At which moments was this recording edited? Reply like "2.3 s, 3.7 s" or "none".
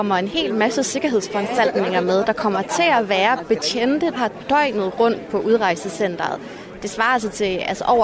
4.2 s